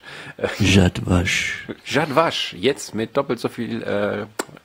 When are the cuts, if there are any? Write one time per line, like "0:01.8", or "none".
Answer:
0:01.8

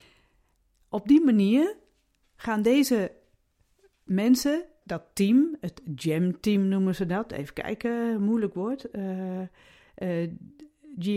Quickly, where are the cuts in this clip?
0:04.8

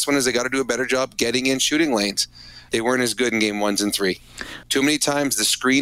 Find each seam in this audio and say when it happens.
0:02.7
0:04.6

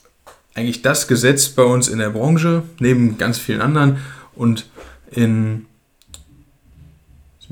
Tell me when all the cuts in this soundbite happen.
none

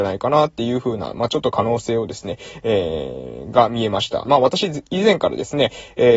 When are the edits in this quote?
0:04.2

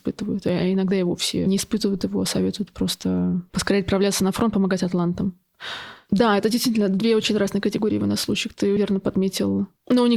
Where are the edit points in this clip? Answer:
0:08.8

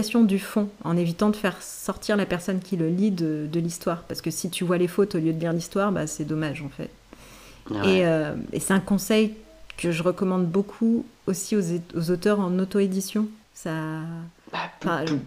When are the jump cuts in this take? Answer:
0:13.4

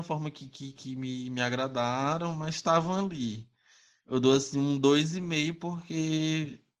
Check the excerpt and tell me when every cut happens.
0:04.0

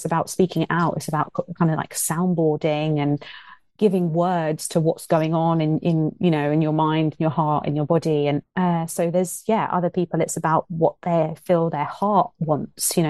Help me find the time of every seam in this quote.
0:08.4

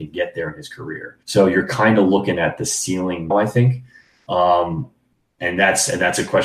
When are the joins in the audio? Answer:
0:01.2
0:03.3

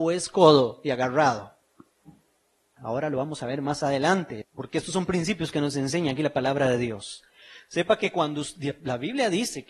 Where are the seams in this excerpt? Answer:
0:02.8
0:04.4

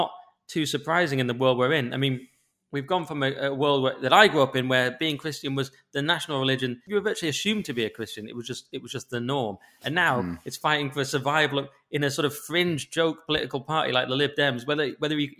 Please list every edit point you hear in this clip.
none

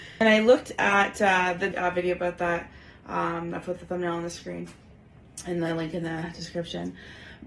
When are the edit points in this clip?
0:01.7

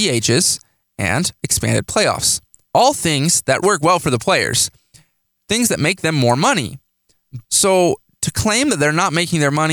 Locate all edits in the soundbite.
0:03.6
0:07.4

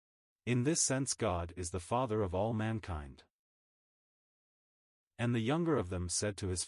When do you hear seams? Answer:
none

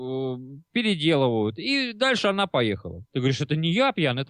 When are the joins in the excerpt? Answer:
0:03.0

